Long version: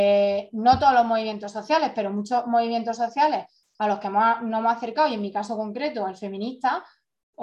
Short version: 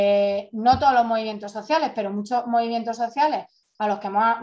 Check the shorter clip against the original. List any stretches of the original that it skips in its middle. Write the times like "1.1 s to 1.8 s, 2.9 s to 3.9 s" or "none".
none